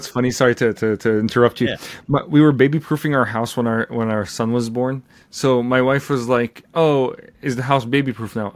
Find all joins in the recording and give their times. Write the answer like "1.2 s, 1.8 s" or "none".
none